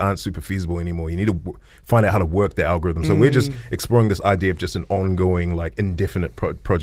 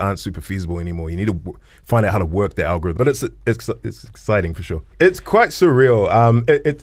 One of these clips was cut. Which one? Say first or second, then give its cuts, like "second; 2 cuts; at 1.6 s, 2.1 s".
second; 2 cuts; at 3.0 s, 4.9 s